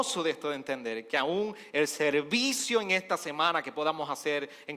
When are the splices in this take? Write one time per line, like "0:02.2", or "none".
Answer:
none